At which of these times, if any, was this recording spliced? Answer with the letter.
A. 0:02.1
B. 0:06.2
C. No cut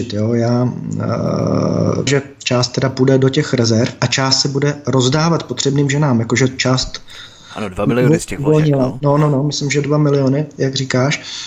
A